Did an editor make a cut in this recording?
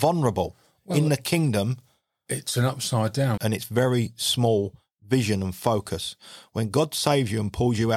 yes; 1 cut; at 3.4 s

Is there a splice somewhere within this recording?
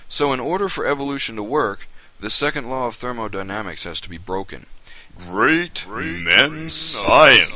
yes; 2 cuts; at 5.1 s, 6.7 s

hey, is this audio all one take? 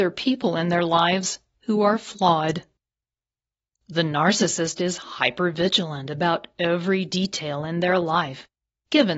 no; 1 cut; at 3.7 s

